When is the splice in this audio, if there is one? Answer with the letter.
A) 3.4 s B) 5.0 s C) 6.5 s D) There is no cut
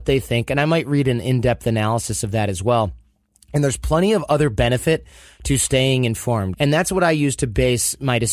C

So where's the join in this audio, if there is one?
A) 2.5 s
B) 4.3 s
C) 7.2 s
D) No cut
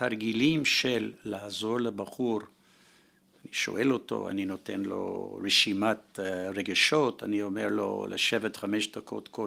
B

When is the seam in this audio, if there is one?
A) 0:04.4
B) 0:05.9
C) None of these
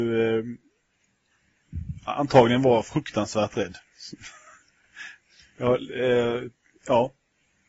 C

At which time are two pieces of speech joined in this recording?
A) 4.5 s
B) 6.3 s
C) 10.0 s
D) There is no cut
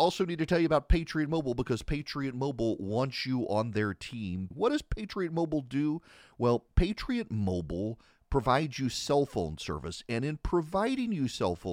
A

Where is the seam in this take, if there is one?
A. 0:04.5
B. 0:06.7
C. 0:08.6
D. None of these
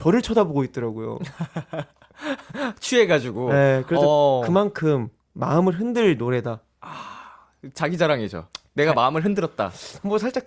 D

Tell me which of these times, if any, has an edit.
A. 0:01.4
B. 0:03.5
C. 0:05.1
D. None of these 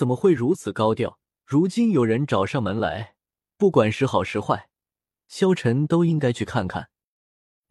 A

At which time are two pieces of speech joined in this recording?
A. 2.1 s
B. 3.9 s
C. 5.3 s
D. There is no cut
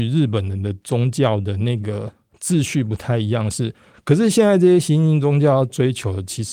B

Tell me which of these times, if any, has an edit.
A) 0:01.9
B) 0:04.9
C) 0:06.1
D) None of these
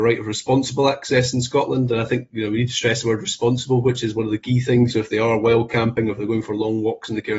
B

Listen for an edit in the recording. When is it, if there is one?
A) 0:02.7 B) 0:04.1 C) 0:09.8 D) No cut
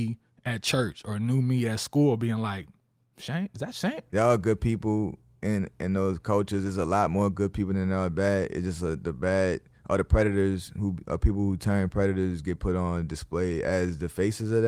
B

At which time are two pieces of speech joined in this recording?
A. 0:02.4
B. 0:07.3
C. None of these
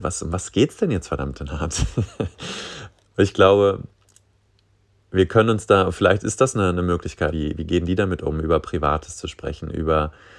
B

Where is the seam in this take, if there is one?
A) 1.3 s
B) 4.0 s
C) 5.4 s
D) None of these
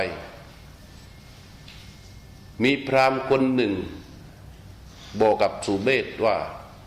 C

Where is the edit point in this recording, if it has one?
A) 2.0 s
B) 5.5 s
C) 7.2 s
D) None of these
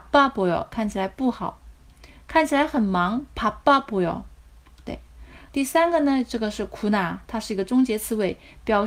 B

